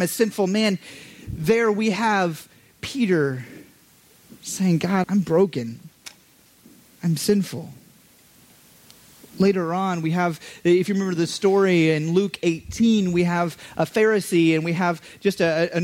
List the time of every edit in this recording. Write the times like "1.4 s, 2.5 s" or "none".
5.0 s